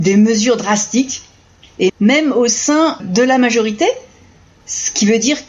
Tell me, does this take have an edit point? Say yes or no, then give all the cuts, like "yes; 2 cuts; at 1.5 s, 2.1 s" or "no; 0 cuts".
yes; 2 cuts; at 1.9 s, 3.0 s